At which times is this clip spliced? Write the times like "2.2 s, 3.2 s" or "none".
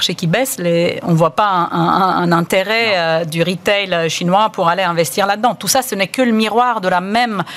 none